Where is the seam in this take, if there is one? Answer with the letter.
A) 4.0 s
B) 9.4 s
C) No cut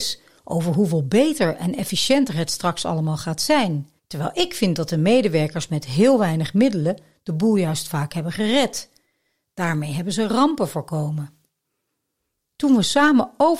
A